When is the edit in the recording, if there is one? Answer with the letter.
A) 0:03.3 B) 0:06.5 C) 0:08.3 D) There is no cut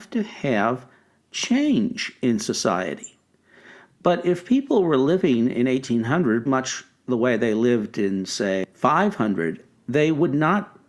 B